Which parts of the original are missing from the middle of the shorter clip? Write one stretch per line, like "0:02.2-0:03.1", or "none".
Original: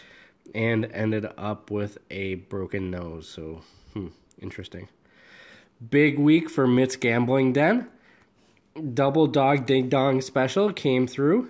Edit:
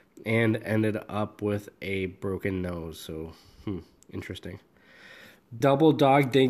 0:05.9-0:08.9